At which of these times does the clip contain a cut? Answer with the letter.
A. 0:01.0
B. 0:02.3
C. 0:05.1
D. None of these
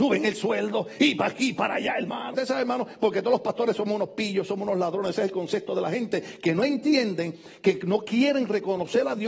B